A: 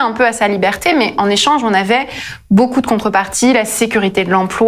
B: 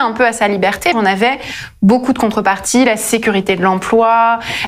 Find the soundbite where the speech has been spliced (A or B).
B